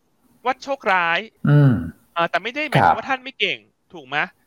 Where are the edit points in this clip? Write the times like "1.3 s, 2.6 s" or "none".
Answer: 1.4 s

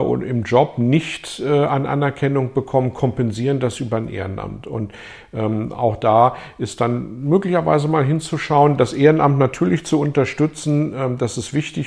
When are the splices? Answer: none

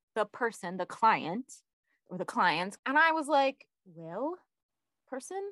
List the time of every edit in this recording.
2.8 s

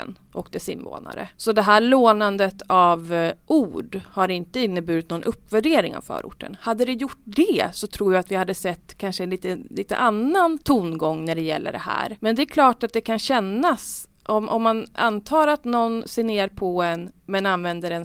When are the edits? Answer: none

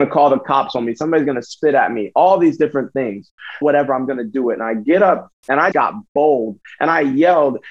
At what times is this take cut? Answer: 3.6 s, 5.7 s

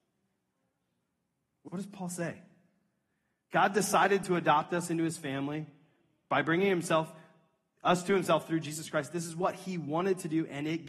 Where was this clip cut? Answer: 1.7 s

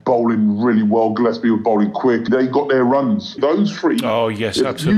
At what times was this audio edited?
2.3 s, 3.4 s

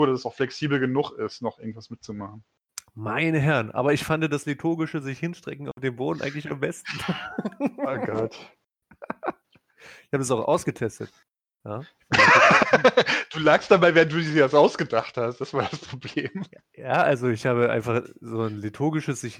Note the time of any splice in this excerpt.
none

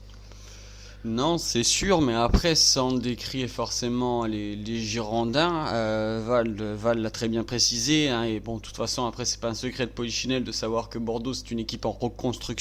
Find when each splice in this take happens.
none

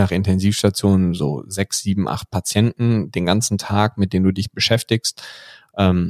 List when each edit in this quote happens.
none

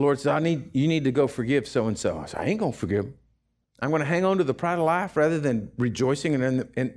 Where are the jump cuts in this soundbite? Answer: 3.6 s

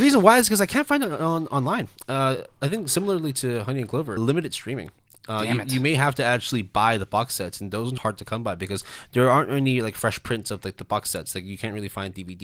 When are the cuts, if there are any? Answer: 4.2 s, 8.0 s

